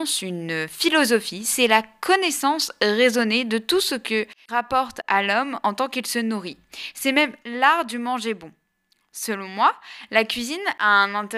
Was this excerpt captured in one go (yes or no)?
yes